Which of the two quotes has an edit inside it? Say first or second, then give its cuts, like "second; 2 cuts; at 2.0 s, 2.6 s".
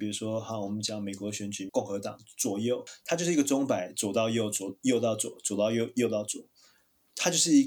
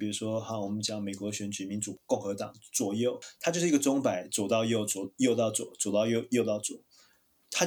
first; 1 cut; at 1.7 s